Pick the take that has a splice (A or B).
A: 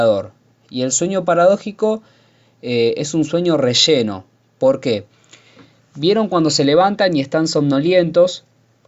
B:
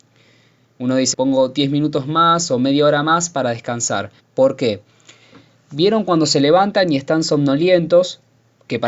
B